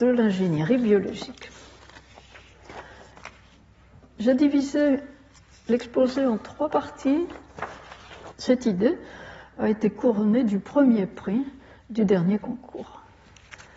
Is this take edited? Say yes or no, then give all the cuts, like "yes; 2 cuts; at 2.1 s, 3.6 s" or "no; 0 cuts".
yes; 1 cut; at 8.3 s